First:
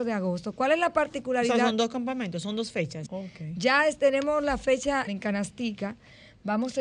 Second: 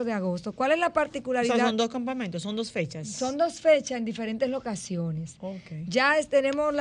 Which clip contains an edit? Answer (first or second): first